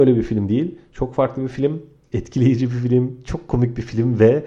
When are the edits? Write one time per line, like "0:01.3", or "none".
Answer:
0:02.0